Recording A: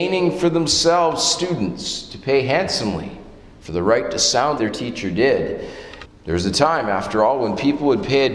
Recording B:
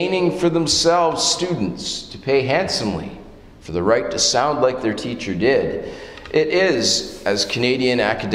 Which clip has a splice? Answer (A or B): A